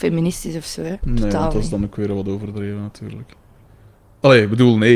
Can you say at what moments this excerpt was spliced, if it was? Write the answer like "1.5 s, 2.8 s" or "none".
none

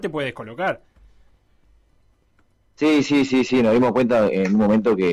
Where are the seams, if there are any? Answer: none

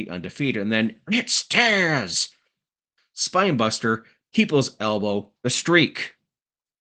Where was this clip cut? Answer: 3.0 s, 5.4 s

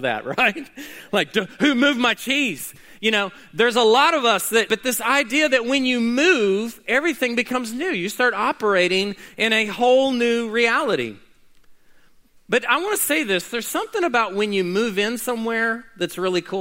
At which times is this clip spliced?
4.7 s

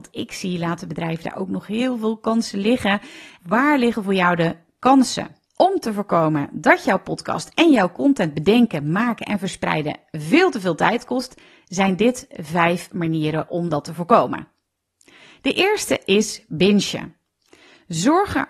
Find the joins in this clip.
3.4 s, 5.4 s

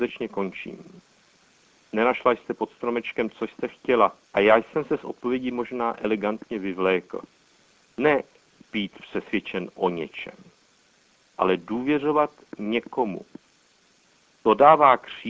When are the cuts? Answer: 4.2 s, 7.8 s

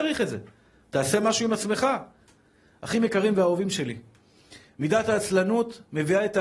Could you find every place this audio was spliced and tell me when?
none

